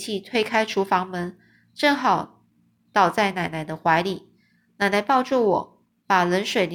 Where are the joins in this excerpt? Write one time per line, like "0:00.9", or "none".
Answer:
none